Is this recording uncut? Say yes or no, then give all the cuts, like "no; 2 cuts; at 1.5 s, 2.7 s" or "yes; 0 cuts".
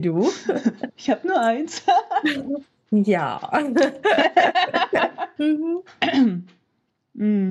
no; 1 cut; at 5.4 s